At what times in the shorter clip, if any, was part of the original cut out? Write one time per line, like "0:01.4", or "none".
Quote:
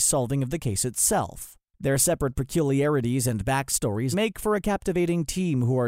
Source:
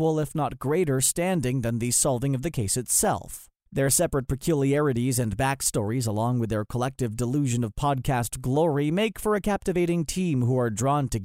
0:04.1